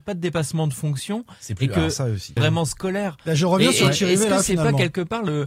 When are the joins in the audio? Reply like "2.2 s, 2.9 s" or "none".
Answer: 2.4 s